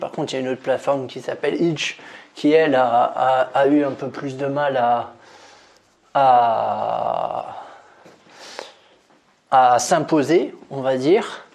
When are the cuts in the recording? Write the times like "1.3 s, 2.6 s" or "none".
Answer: none